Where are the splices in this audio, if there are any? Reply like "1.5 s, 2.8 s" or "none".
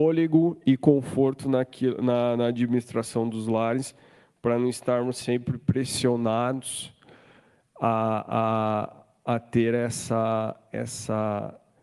none